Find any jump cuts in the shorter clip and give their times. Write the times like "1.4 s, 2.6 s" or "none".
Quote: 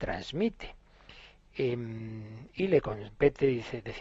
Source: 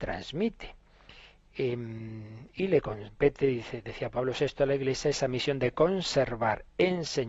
none